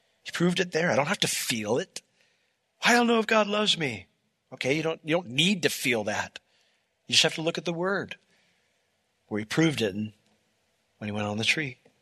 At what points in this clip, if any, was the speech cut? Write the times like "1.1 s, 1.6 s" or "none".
2.6 s